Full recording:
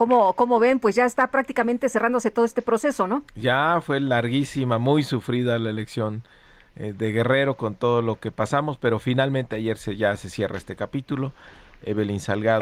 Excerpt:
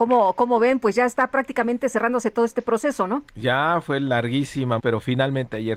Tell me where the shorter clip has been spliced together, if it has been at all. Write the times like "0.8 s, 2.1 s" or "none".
4.8 s